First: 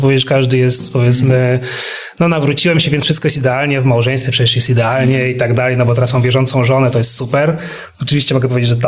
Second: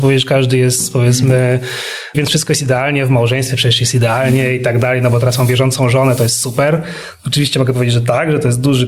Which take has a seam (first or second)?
second